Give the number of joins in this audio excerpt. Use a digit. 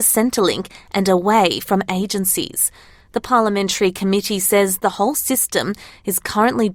0